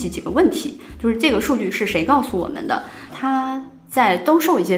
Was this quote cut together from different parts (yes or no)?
yes